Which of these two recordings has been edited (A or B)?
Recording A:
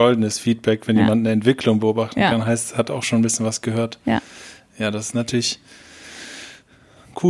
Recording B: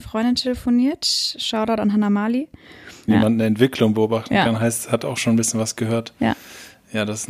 B